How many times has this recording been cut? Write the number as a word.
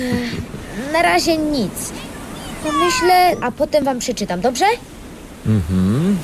one